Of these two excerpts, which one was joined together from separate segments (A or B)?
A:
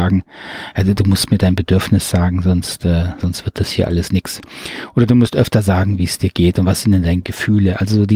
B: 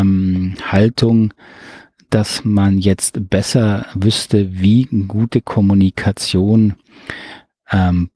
A